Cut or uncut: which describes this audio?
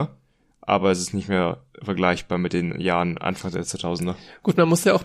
uncut